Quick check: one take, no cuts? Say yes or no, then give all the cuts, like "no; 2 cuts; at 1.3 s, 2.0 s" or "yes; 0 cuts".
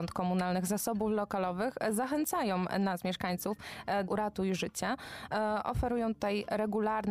no; 1 cut; at 4.1 s